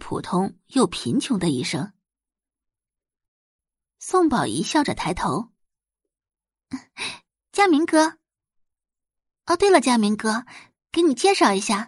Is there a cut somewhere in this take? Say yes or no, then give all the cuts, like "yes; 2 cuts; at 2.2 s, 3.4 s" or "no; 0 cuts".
yes; 1 cut; at 3.3 s